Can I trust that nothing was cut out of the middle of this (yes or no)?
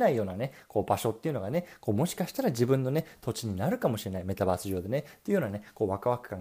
yes